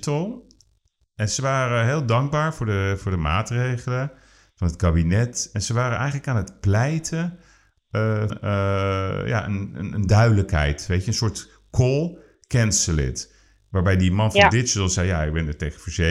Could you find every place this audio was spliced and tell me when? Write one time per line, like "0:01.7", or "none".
0:08.3